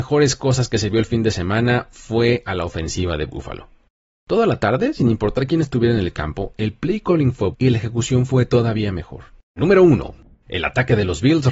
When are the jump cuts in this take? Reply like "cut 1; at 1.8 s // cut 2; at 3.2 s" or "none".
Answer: cut 1; at 7.5 s // cut 2; at 9.6 s

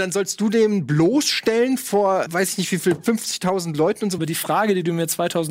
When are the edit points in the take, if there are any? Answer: cut 1; at 2.3 s // cut 2; at 4.2 s

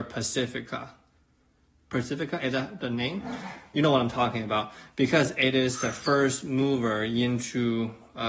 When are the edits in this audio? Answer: none

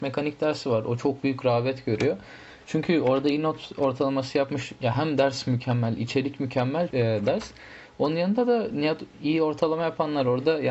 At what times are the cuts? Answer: cut 1; at 6.9 s

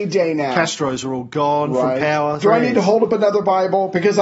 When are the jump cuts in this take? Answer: cut 1; at 2.4 s

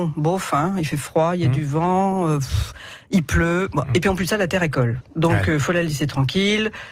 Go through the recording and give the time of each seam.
none

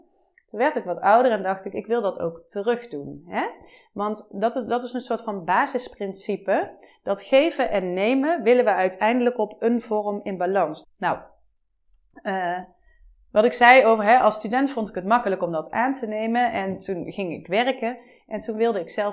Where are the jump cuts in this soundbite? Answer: cut 1; at 10.8 s

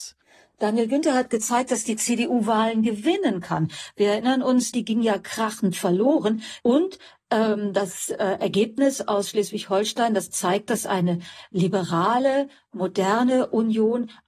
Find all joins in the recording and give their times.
cut 1; at 4.7 s // cut 2; at 6.6 s

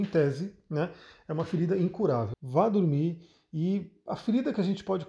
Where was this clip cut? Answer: cut 1; at 2.3 s

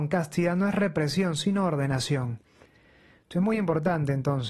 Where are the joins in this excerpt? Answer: none

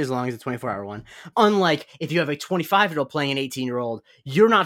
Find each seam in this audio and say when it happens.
cut 1; at 1.3 s

